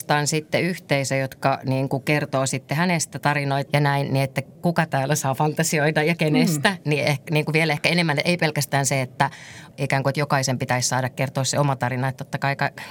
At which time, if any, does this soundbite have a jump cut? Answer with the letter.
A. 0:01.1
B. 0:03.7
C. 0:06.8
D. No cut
B